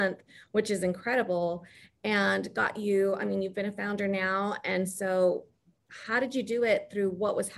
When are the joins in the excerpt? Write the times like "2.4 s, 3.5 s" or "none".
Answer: none